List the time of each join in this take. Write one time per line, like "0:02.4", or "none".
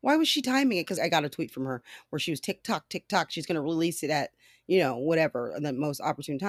0:01.0